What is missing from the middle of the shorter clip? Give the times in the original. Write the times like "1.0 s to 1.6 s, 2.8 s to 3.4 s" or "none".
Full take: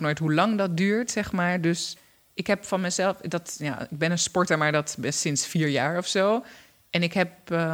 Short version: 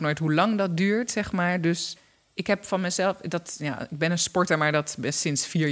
none